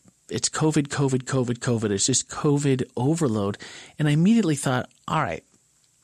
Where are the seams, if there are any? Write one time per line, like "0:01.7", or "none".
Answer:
none